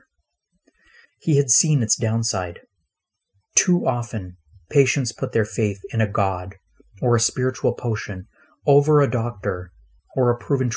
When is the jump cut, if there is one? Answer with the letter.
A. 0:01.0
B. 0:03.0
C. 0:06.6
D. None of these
A